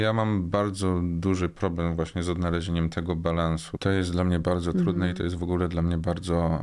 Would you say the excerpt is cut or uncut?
cut